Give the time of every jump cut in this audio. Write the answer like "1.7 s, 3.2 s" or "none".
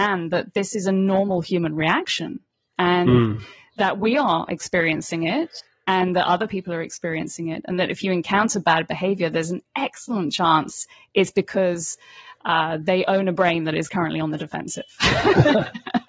none